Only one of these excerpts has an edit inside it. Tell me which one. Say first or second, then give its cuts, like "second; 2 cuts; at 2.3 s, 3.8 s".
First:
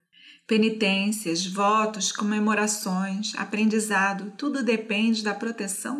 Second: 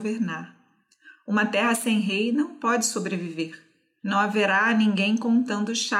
second; 1 cut; at 4.0 s